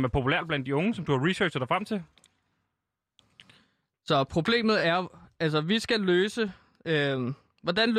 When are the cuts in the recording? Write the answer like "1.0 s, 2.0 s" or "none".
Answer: none

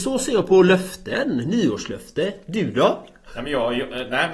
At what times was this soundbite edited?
none

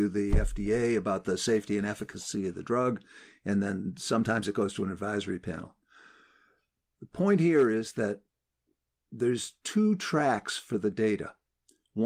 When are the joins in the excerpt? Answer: none

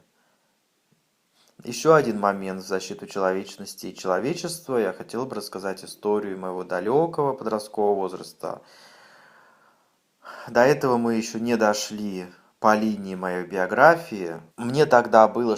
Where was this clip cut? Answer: 14.5 s

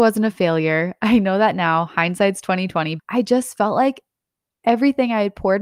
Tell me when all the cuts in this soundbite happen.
3.0 s

